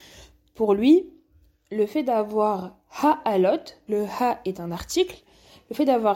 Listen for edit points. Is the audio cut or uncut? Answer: cut